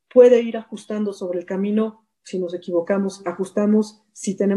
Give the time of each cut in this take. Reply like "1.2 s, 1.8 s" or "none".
2.1 s

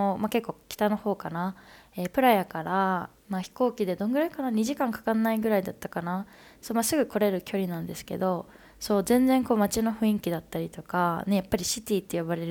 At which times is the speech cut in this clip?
none

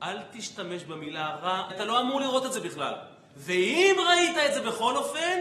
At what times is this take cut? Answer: 1.7 s

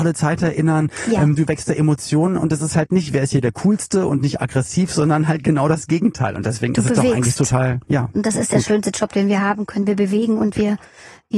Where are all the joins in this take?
none

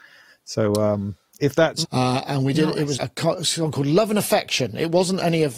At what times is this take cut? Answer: 1.8 s, 3.0 s

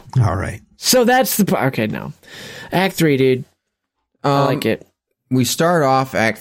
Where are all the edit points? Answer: none

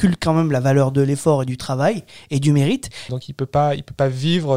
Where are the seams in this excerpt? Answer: 3.1 s

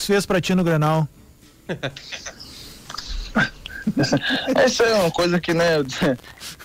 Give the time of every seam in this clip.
none

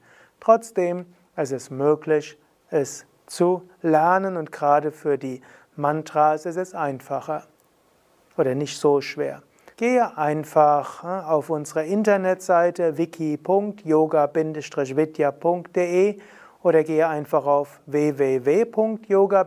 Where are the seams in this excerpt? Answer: 9.7 s

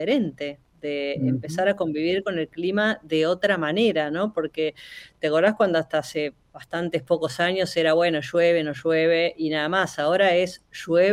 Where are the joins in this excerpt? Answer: none

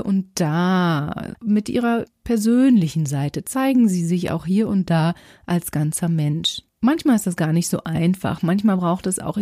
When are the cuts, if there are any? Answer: 1.3 s, 6.7 s

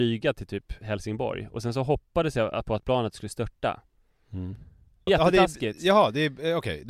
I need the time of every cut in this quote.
5.1 s

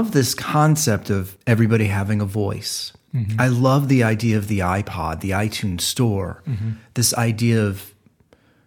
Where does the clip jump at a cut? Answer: none

